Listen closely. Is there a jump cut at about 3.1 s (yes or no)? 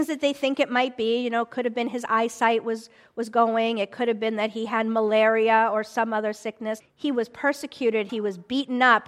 no